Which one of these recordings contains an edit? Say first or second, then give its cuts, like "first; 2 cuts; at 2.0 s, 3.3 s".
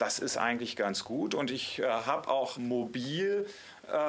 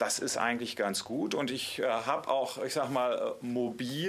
first; 1 cut; at 2.5 s